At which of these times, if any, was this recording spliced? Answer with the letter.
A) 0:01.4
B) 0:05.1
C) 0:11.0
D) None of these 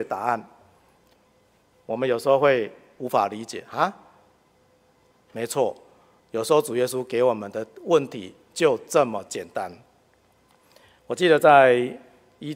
B